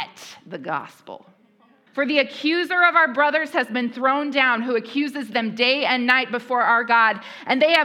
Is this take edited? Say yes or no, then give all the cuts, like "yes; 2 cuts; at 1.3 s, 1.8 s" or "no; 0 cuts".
yes; 1 cut; at 1.9 s